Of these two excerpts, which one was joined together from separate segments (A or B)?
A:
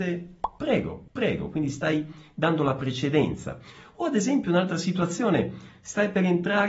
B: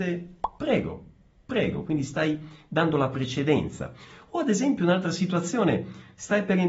A